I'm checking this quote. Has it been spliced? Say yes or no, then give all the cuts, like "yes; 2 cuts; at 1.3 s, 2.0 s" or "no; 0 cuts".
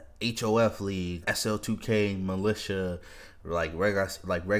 yes; 1 cut; at 1.2 s